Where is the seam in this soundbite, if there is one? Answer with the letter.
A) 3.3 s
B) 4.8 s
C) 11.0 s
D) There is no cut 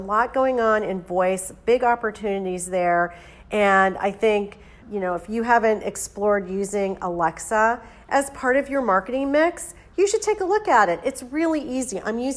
B